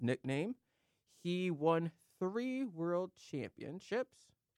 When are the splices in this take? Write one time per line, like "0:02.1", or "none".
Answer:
none